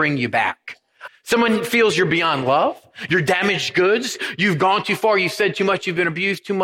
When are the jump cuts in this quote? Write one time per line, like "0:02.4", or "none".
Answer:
0:01.1